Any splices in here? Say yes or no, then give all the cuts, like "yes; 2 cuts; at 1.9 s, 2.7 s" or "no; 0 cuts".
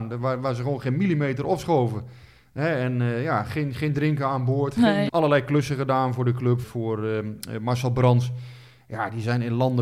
yes; 2 cuts; at 5.1 s, 6.6 s